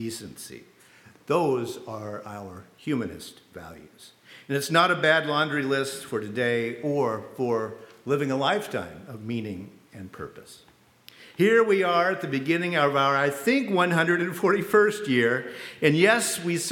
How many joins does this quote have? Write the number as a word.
zero